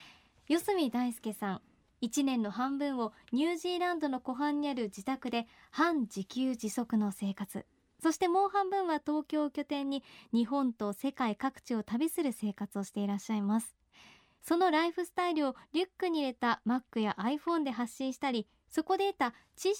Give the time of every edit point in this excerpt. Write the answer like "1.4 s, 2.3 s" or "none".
none